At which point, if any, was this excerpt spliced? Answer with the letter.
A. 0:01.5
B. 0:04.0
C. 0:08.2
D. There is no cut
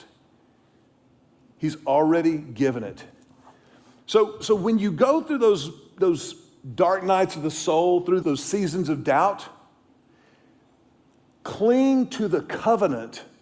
C